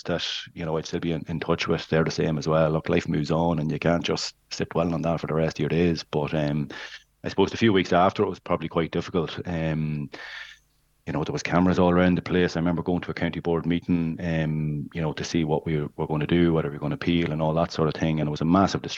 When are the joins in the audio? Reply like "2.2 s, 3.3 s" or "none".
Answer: none